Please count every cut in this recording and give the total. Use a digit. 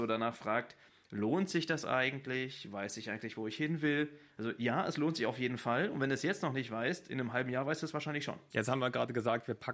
1